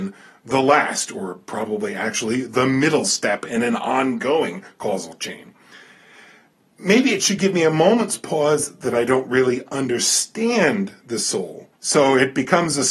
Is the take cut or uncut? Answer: cut